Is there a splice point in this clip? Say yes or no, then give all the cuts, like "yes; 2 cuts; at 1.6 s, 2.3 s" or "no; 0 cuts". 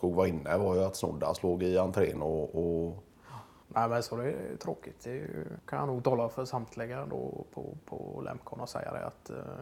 no; 0 cuts